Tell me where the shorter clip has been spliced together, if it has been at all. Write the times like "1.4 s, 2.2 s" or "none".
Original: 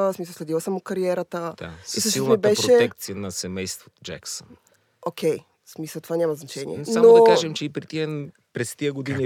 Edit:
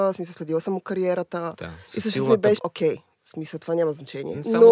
2.6 s